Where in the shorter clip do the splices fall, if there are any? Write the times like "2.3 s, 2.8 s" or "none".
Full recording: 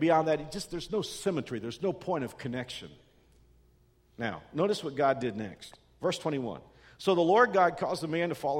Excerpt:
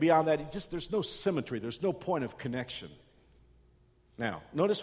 none